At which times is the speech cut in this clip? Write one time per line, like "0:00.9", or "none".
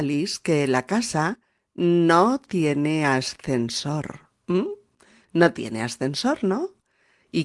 0:04.4